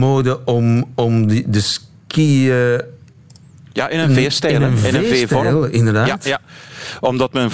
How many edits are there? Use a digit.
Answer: 0